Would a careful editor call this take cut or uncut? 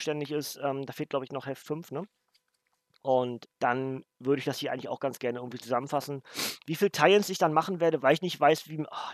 cut